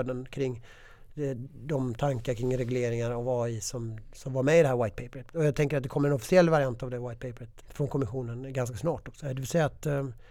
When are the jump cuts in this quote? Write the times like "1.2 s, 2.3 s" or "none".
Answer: 7.6 s, 9.2 s